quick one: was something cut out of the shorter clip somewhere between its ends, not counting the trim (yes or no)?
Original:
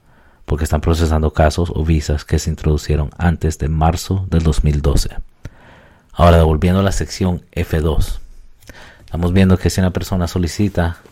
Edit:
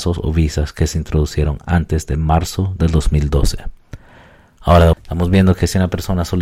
yes